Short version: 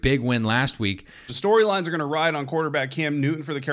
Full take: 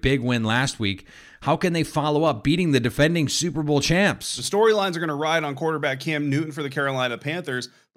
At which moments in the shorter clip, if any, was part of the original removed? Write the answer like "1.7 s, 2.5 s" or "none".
1.3 s